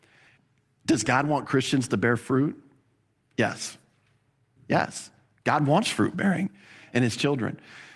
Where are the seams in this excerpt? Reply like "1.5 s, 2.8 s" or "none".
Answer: 4.6 s